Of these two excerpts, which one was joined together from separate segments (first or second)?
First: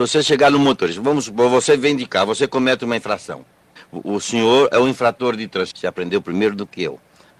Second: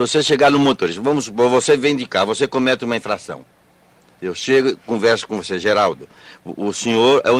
first